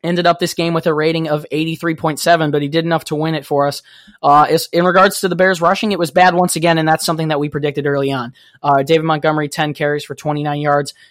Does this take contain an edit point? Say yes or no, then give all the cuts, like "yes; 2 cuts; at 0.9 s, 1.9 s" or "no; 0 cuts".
no; 0 cuts